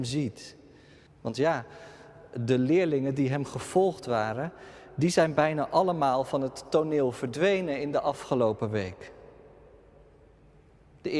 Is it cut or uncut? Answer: cut